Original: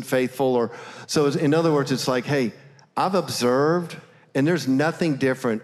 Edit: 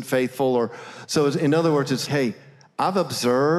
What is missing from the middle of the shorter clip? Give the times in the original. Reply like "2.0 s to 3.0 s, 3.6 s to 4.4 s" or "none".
2.1 s to 2.2 s

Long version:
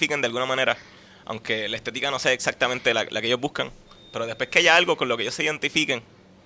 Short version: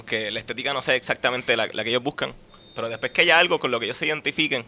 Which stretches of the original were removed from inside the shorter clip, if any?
none

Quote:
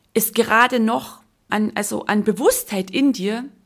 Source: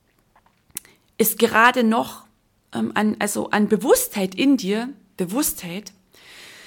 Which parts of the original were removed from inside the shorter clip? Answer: 2.5 s to 2.9 s

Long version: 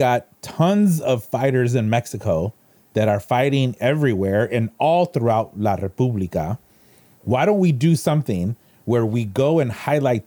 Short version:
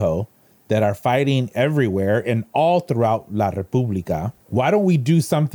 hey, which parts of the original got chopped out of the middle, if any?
6.7 s to 7.1 s

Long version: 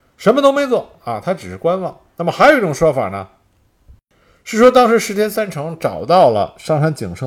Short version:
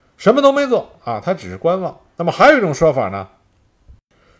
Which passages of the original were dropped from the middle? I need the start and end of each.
none

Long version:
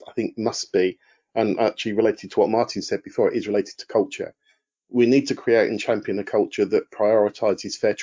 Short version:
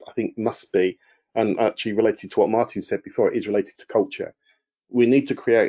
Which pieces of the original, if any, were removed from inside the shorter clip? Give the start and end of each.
none

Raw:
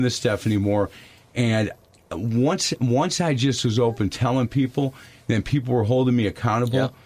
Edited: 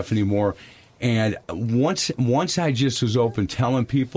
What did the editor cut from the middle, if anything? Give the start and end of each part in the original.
1.8 s to 2.1 s

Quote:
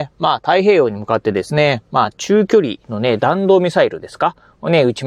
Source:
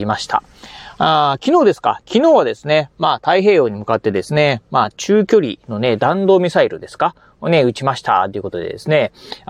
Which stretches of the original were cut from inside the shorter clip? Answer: none

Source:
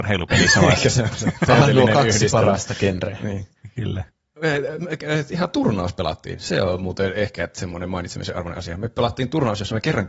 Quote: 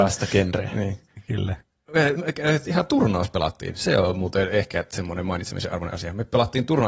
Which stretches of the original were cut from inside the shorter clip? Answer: 4.6 s to 4.8 s

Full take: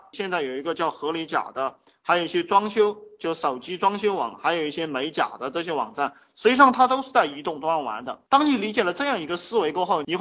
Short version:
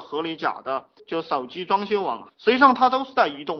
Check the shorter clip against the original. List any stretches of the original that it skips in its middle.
1.9 s to 3.1 s, 4.4 s to 6.3 s

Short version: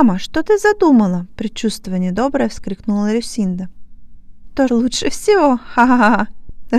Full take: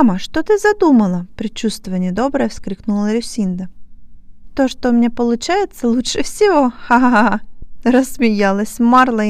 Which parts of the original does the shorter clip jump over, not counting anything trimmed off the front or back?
4.7 s to 5.8 s

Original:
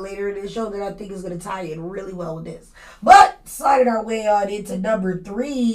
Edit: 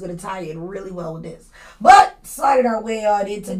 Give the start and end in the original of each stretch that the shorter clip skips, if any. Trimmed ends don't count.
none

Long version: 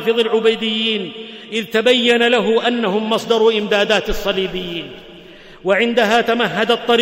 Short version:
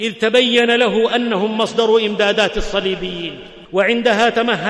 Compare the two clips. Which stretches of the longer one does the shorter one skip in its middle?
5.2 s to 5.6 s

